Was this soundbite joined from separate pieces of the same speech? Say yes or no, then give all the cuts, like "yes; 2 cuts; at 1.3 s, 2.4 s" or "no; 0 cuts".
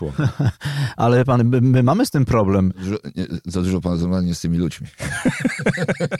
no; 0 cuts